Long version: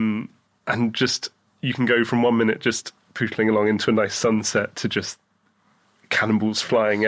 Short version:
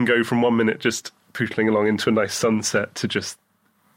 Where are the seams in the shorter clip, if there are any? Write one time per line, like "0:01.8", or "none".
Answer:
none